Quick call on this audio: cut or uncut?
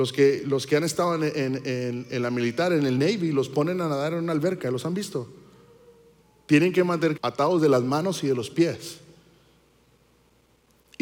cut